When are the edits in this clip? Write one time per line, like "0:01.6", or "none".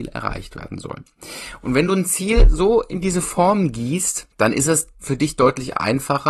0:04.3